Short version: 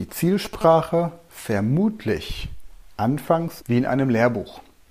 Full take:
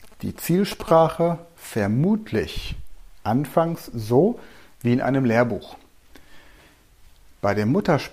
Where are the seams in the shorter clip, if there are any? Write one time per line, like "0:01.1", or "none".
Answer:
0:03.6